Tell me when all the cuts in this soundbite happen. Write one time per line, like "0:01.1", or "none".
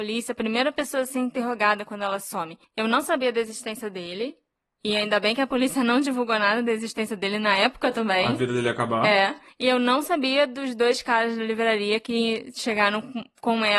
none